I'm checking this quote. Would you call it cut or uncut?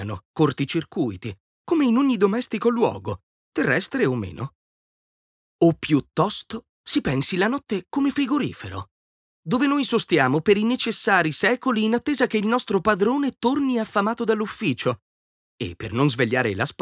uncut